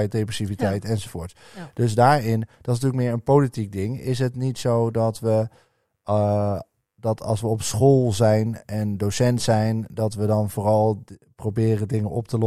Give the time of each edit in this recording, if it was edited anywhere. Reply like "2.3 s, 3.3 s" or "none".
none